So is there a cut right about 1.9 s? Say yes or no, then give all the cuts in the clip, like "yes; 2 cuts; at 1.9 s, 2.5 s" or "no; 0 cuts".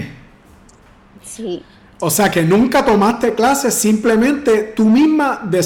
no; 0 cuts